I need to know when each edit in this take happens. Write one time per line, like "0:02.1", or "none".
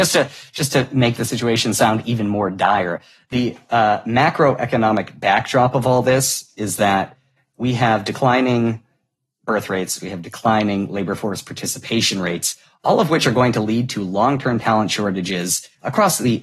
0:10.0